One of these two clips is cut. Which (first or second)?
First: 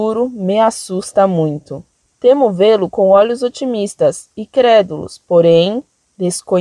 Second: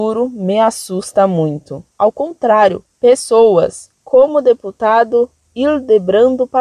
second